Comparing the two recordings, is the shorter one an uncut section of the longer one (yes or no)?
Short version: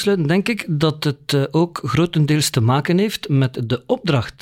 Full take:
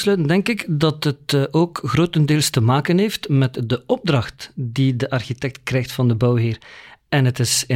yes